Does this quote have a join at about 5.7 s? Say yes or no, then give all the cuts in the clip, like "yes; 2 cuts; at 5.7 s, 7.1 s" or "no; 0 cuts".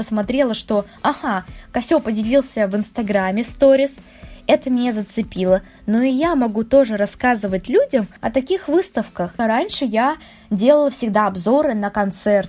no; 1 cut; at 9.4 s